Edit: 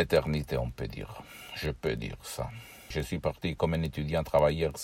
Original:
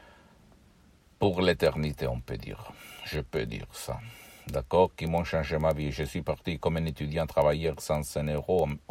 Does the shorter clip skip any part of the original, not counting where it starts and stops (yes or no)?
yes